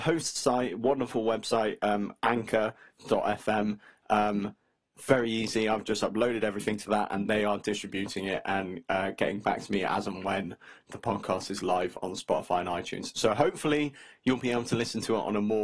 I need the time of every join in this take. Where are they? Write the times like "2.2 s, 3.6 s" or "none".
none